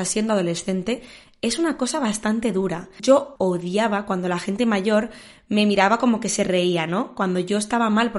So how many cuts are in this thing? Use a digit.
1